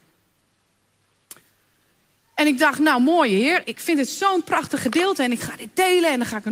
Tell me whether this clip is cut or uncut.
cut